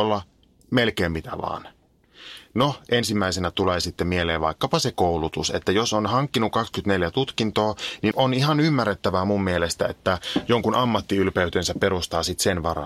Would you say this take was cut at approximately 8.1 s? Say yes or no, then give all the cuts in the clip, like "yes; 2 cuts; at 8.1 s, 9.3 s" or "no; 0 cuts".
yes; 1 cut; at 8.1 s